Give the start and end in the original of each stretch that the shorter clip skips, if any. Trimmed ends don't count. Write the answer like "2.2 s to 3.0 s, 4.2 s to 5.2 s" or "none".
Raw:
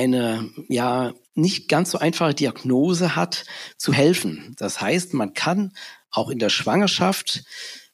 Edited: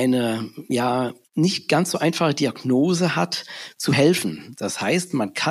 none